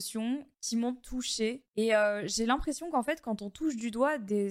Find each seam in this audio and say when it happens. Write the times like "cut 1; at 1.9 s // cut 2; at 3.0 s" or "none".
cut 1; at 1.7 s